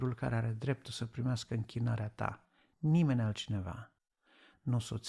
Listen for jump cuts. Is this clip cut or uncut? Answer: uncut